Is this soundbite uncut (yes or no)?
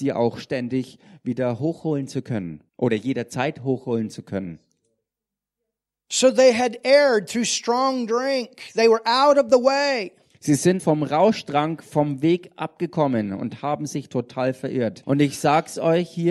no